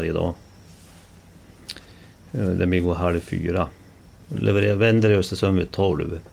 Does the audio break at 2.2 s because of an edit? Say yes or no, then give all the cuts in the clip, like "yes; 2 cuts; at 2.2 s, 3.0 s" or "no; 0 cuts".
no; 1 cut; at 4.2 s